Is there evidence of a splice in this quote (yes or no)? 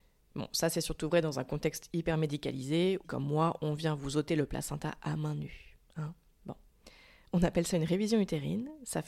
yes